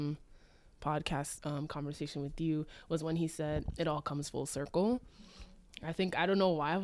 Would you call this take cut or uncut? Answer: uncut